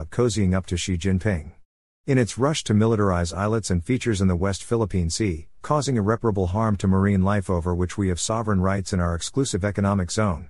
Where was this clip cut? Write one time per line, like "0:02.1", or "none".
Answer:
0:02.0
0:05.6